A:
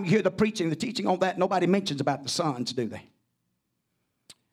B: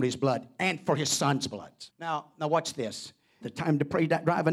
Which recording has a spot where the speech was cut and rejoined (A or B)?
B